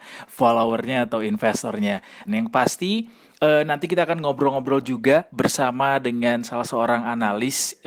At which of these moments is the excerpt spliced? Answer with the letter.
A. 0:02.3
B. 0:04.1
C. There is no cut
A